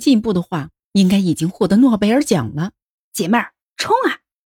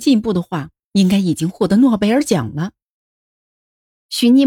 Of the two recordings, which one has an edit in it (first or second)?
first